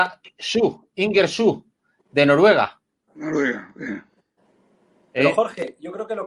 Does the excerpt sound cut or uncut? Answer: uncut